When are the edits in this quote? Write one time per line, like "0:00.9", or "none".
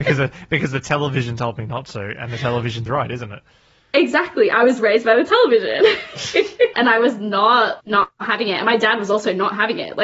0:02.9
0:06.7
0:07.8